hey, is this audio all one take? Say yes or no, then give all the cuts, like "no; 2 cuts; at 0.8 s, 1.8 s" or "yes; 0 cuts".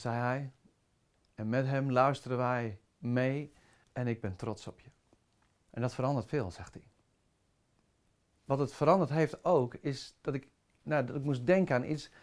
no; 2 cuts; at 3.8 s, 5.6 s